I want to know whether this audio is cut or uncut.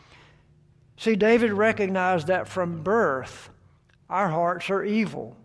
uncut